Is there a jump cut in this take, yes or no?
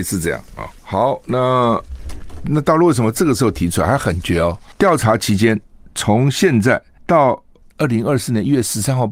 yes